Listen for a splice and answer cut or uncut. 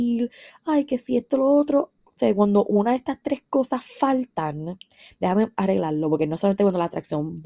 uncut